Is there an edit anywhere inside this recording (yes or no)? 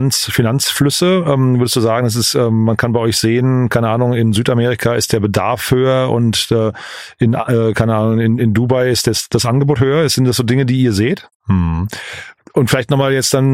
yes